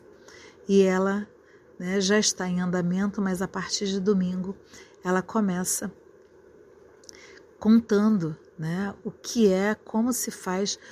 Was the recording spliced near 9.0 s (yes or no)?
no